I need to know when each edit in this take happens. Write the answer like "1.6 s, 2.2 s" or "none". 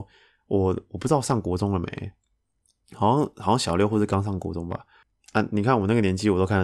none